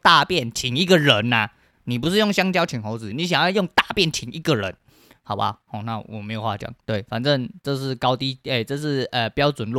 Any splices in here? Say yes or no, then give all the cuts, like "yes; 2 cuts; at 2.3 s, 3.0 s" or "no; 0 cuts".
yes; 1 cut; at 3.1 s